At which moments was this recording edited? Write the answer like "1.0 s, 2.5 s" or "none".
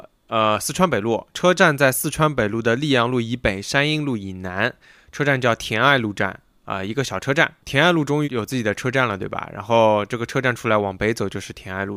8.2 s

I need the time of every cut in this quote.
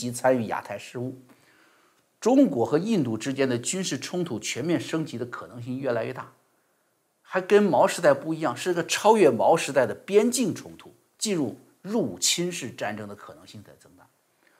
none

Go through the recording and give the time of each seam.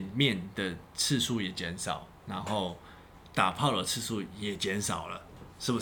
none

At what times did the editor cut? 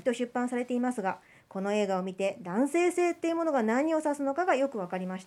none

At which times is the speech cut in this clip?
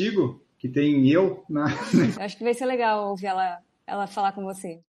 2.1 s

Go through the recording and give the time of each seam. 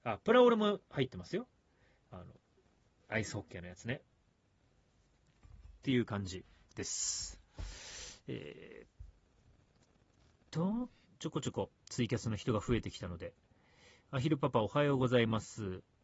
11.0 s

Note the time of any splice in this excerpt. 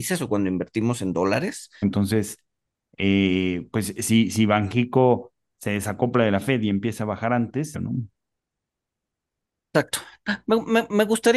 1.8 s, 7.7 s

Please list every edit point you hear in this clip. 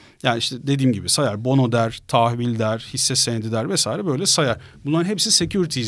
none

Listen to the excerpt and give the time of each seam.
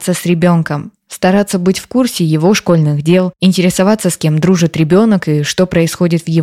none

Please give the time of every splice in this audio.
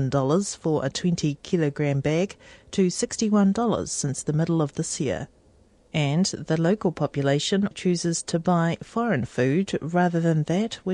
5.8 s, 7.7 s

